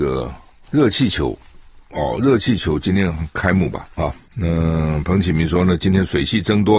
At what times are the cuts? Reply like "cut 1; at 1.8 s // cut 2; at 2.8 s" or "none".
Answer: cut 1; at 4.0 s